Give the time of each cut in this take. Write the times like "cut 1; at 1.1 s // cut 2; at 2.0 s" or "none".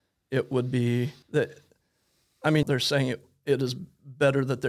cut 1; at 1.2 s // cut 2; at 2.6 s